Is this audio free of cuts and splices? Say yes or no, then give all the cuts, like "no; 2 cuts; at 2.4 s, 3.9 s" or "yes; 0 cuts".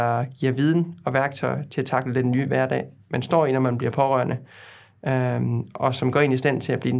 yes; 0 cuts